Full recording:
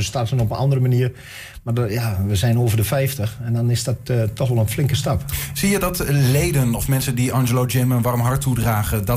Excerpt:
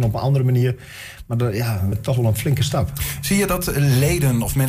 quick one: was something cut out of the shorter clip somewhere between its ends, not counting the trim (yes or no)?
yes